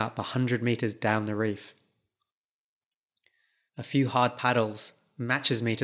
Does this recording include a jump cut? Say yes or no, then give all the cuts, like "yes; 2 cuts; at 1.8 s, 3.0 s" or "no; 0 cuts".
yes; 1 cut; at 3.7 s